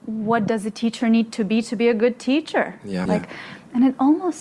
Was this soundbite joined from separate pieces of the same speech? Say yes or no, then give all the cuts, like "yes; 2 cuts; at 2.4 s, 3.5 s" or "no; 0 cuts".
yes; 1 cut; at 3.1 s